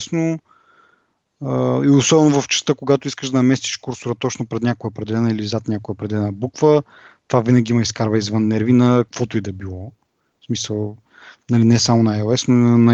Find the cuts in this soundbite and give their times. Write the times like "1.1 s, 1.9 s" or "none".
none